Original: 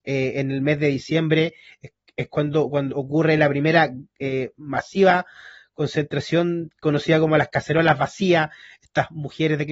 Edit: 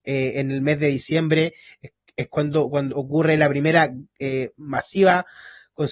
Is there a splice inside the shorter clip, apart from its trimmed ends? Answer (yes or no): no